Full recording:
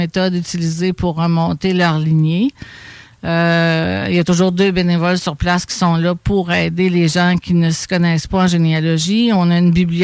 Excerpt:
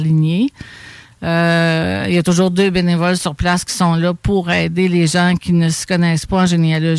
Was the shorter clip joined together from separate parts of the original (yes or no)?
no